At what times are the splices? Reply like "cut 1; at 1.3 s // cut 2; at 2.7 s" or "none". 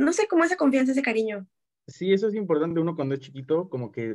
none

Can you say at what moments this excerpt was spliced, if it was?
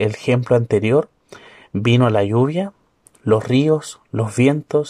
none

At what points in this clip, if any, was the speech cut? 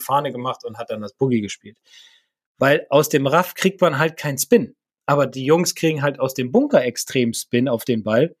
none

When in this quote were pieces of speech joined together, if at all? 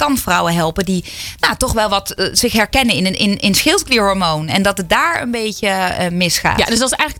none

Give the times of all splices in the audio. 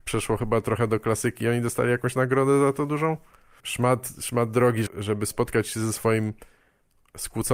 cut 1; at 3.6 s // cut 2; at 4.9 s

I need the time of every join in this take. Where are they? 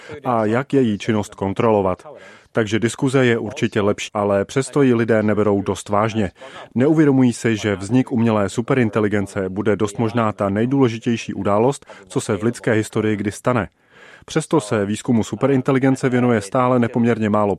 cut 1; at 4.1 s

